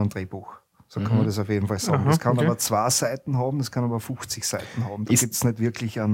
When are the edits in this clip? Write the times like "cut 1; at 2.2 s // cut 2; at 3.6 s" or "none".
none